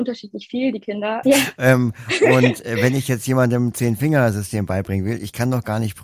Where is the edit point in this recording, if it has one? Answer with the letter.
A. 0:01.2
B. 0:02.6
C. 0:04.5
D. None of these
A